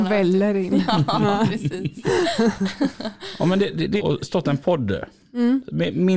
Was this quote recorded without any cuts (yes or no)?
no